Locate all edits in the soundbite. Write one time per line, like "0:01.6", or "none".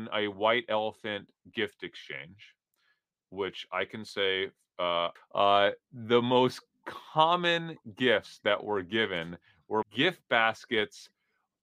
0:05.2
0:09.8

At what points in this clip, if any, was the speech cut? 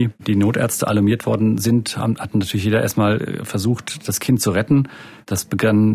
none

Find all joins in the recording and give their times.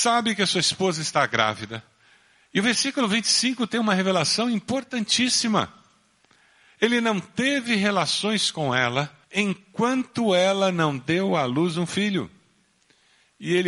0:09.2

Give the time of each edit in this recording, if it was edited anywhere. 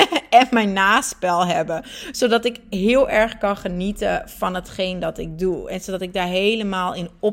none

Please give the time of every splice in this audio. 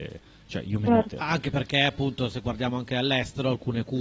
0:01.1

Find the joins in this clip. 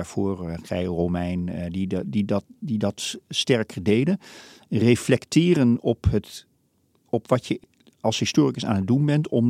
none

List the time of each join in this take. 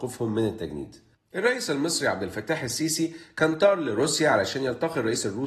0:01.1

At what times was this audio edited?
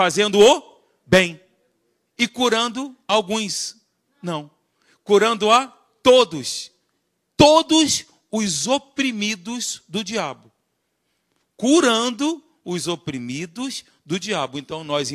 none

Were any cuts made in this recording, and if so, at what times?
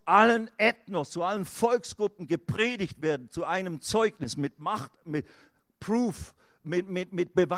none

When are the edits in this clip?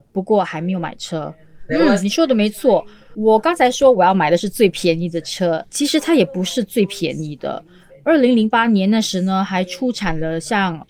0:01.7

